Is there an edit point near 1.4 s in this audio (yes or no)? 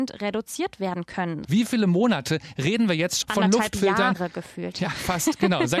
yes